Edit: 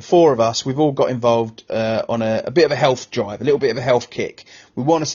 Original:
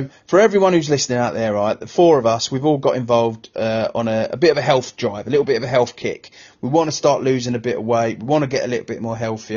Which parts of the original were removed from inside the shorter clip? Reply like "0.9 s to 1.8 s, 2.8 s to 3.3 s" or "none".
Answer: none